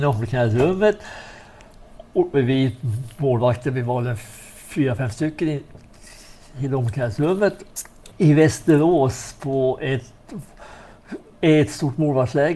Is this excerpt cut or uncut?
cut